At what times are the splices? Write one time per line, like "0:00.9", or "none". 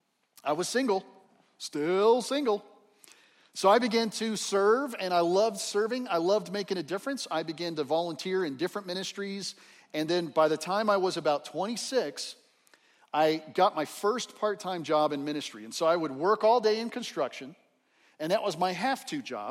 none